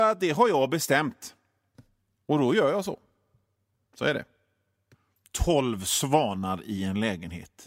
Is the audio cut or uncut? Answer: uncut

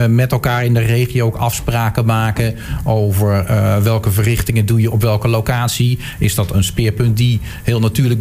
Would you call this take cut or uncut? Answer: uncut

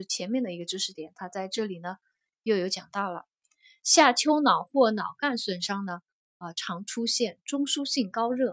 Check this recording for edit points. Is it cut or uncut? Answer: uncut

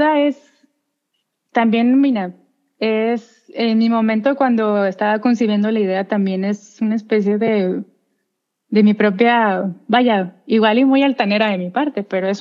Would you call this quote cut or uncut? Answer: uncut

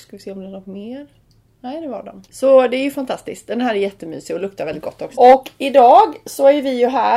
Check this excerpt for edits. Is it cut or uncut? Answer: cut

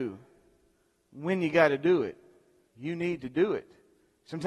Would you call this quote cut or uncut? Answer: cut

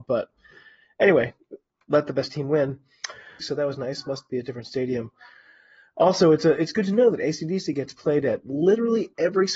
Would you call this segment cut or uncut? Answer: cut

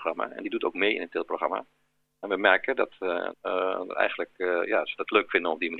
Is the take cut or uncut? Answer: cut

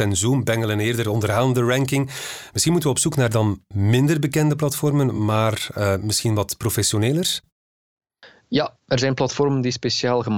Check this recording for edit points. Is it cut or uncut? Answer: uncut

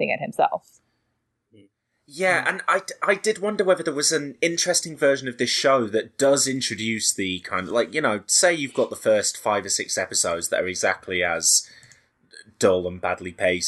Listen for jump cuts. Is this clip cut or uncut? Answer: uncut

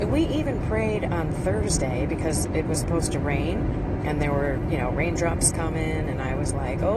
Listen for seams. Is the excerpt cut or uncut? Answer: uncut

